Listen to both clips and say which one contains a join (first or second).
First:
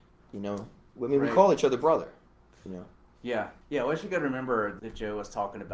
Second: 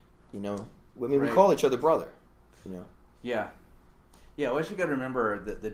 first